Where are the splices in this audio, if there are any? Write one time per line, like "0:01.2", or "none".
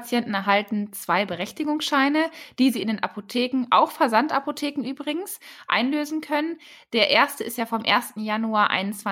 none